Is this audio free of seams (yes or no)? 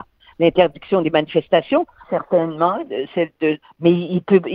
no